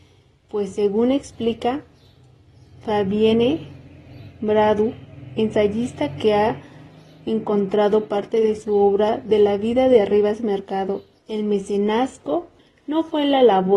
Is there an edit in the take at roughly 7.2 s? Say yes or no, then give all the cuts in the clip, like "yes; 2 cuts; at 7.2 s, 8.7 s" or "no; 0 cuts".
no; 1 cut; at 11.2 s